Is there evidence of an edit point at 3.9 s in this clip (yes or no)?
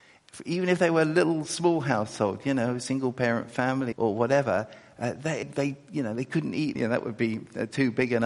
yes